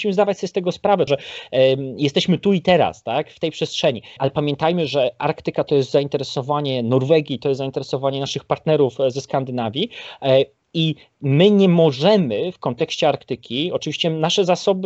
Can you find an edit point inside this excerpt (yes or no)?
yes